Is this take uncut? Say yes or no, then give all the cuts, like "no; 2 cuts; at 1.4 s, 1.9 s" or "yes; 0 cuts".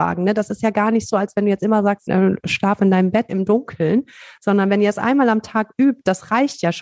no; 2 cuts; at 2.1 s, 3.3 s